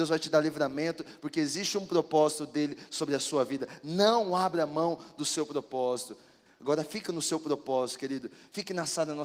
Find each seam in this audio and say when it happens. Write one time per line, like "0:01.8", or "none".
0:06.5